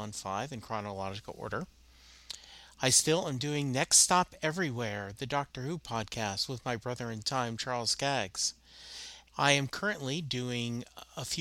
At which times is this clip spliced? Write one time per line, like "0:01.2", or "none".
0:09.3